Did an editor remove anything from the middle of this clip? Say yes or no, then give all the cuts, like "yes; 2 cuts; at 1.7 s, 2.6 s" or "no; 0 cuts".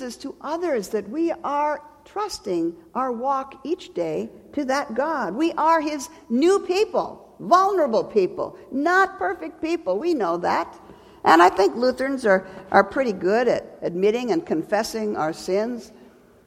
no; 0 cuts